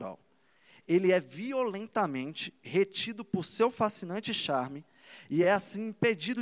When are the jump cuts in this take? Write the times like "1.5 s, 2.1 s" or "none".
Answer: none